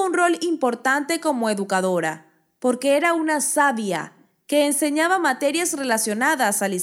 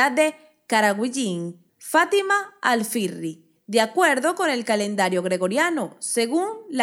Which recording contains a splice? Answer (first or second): second